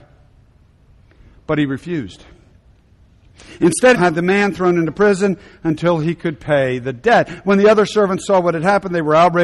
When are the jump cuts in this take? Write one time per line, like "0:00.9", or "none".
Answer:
0:03.9